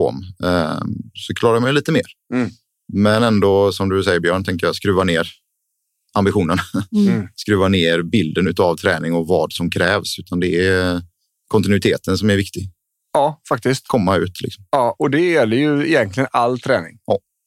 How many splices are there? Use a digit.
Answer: 0